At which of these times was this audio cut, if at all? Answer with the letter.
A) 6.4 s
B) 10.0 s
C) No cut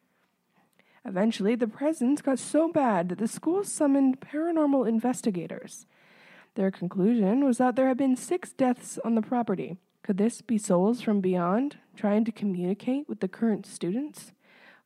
B